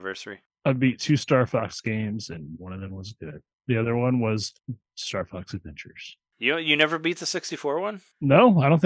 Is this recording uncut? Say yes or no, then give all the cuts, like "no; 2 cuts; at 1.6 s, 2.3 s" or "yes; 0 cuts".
yes; 0 cuts